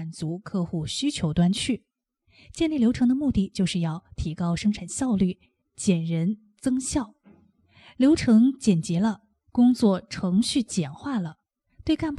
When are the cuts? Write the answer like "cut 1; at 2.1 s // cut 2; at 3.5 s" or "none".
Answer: cut 1; at 9.5 s